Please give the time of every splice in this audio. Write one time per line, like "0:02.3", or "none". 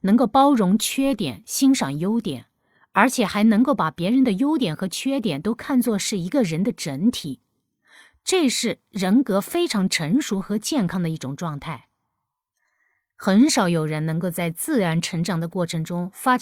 none